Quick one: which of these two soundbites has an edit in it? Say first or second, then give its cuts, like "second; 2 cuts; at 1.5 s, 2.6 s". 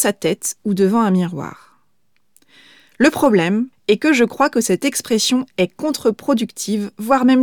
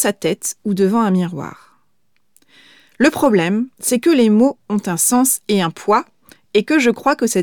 first; 1 cut; at 3.7 s